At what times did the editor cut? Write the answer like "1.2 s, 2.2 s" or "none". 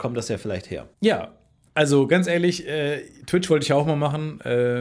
0.9 s